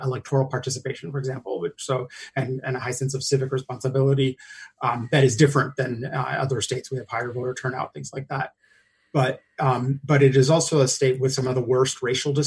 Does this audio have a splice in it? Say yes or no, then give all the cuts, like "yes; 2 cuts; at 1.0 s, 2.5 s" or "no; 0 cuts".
no; 0 cuts